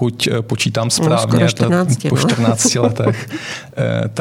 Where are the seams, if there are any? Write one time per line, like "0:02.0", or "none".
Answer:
none

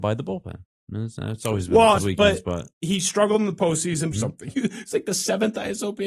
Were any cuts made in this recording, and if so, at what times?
0:02.0
0:04.1

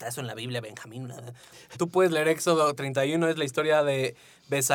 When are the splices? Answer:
0:01.7

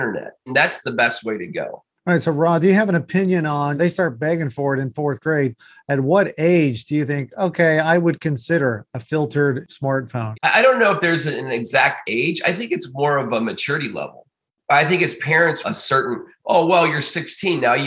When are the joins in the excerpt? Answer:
0:15.6

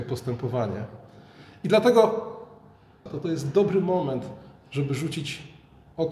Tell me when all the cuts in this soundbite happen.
0:03.1

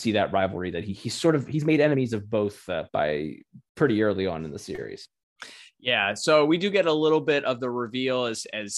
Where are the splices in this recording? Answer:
0:02.9

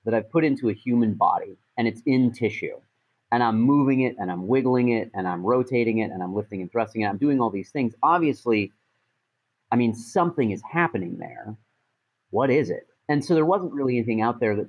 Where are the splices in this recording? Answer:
0:13.0

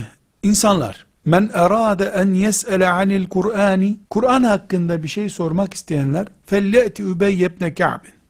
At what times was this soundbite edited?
0:01.1
0:04.0

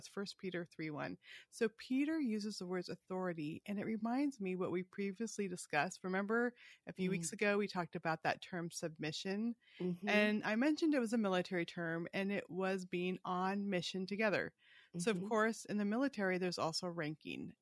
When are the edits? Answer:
none

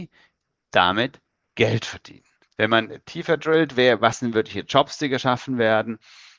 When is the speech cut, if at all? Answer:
0:02.4

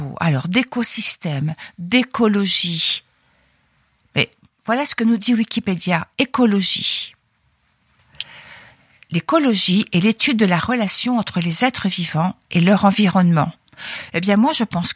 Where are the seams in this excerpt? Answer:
none

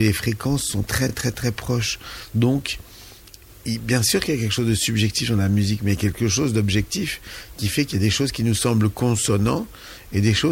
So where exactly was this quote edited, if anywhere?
none

